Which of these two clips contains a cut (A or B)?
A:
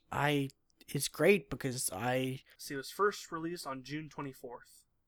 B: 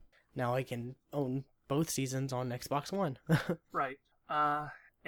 A